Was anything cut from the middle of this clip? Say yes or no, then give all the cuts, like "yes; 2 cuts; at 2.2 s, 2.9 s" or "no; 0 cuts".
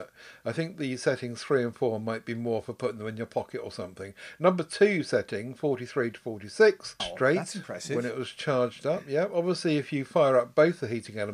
yes; 1 cut; at 7.0 s